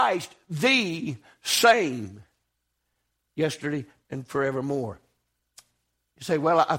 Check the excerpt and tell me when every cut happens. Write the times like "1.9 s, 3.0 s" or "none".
4.0 s